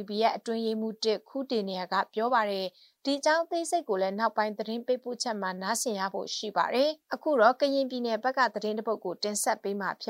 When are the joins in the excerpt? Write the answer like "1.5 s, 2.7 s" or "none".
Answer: 7.0 s